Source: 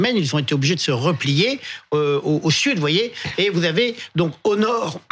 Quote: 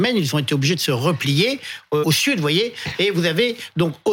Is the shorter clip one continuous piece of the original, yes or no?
no